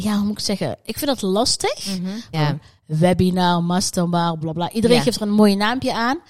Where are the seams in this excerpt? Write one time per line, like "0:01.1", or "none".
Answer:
0:02.3
0:04.4